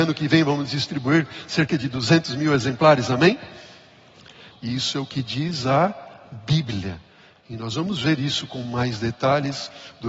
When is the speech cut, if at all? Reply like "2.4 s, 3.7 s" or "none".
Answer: 4.5 s